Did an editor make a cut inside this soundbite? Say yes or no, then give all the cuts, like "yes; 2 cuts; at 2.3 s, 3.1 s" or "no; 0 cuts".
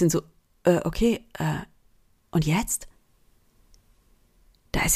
no; 0 cuts